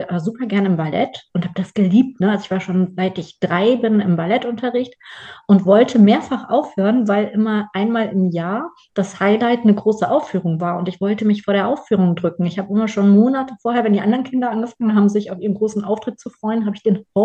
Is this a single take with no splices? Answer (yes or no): yes